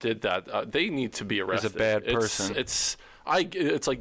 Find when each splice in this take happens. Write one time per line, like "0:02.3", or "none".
0:02.5